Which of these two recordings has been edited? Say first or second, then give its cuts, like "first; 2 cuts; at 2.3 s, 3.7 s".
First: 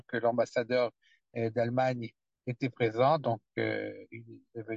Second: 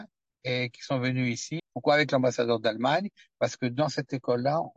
second; 1 cut; at 1.6 s